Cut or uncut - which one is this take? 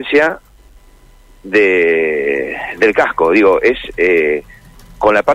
uncut